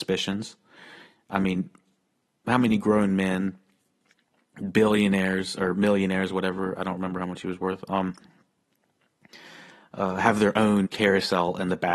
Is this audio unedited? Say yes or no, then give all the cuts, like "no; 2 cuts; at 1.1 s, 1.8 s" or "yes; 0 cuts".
no; 1 cut; at 10.8 s